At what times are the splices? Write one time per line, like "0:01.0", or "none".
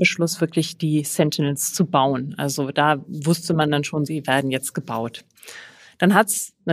0:04.1